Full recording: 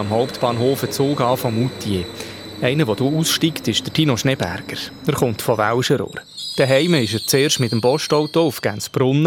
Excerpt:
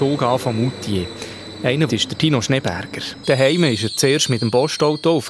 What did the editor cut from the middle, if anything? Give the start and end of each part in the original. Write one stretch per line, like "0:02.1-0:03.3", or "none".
0:02.9-0:03.6
0:05.0-0:06.5